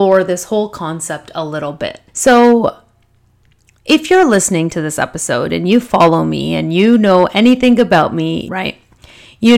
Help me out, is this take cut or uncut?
cut